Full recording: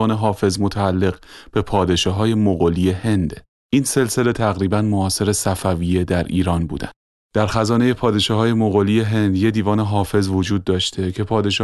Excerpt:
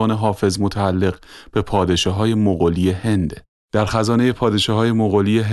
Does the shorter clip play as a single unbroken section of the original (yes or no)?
no